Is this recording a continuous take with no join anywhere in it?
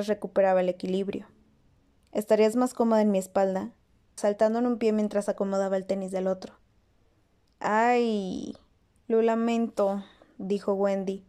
no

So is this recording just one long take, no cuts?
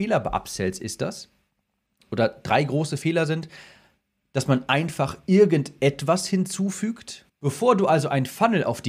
no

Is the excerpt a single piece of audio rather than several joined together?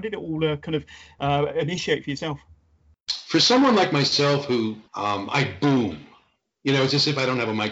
no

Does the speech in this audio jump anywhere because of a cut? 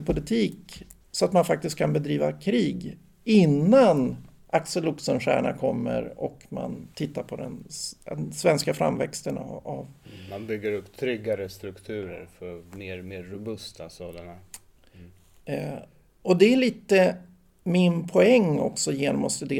no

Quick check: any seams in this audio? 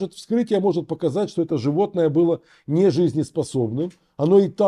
no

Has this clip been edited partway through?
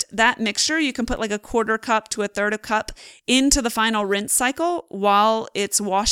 no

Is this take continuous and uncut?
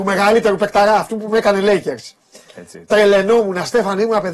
yes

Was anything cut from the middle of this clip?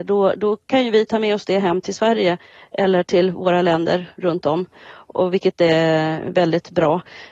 no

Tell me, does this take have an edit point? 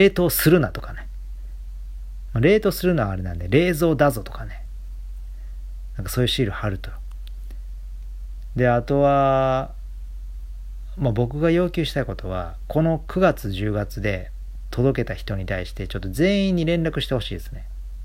no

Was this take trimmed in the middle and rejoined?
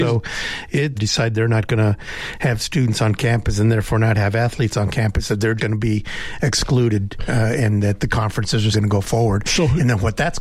yes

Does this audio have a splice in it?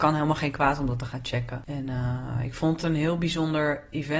no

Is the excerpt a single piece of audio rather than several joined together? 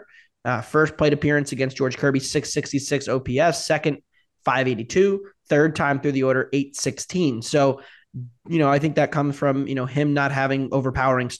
yes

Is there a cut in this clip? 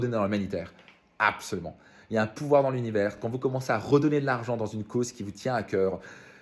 no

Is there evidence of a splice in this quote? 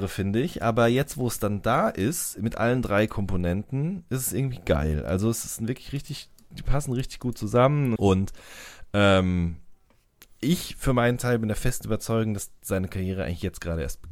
yes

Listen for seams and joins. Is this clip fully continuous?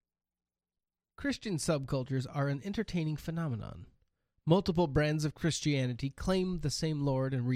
yes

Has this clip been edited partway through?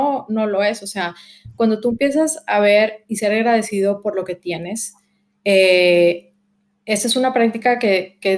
no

